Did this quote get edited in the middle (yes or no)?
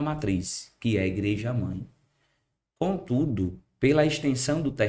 no